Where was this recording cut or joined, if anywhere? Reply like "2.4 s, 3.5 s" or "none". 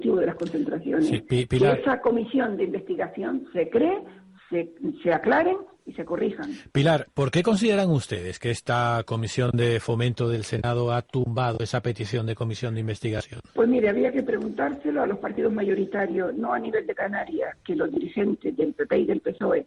7.1 s, 13.5 s